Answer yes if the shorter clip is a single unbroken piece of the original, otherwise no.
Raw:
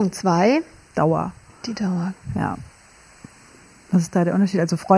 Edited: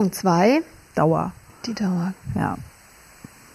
yes